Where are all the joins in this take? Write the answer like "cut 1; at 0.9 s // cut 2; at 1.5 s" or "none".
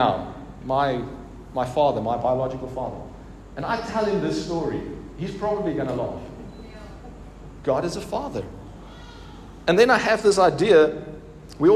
cut 1; at 7.6 s